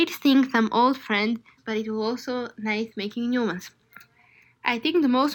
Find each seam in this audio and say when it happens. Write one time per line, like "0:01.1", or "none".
0:01.6